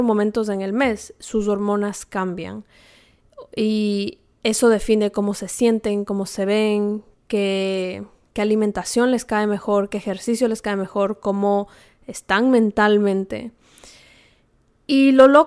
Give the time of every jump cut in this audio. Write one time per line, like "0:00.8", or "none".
none